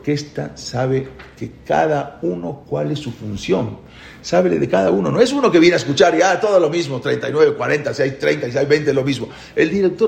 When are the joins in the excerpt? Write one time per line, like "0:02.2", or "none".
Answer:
none